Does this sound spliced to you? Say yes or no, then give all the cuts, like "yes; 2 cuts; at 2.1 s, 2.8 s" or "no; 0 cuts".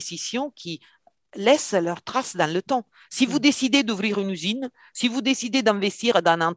no; 0 cuts